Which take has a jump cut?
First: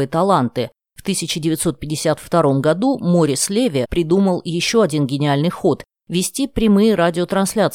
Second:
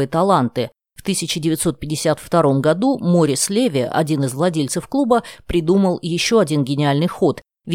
first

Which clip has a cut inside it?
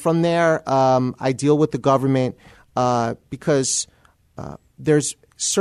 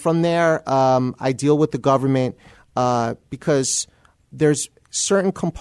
second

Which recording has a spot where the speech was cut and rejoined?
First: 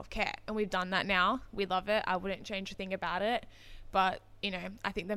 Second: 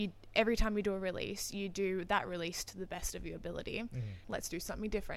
second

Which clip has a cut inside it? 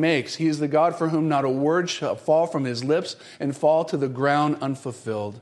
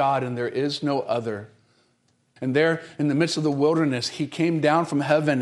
second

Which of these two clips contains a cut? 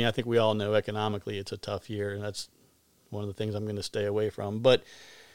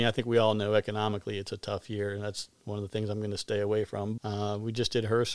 second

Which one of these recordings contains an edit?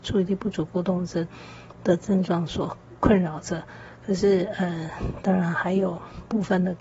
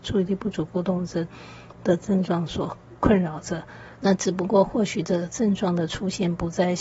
second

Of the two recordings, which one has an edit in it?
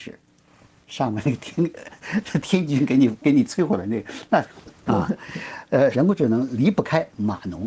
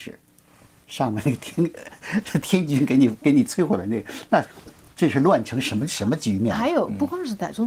first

